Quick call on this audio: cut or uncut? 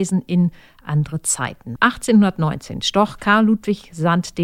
cut